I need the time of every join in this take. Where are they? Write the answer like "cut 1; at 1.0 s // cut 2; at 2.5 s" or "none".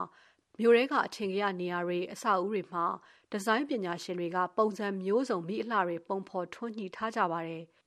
none